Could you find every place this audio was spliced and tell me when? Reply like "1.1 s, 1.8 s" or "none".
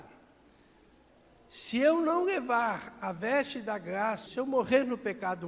4.3 s